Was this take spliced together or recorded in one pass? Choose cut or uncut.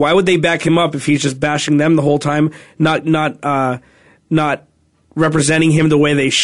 uncut